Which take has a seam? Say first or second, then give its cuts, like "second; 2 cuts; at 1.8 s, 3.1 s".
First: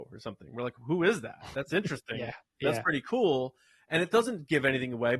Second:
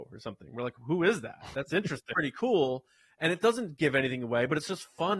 second; 1 cut; at 2.1 s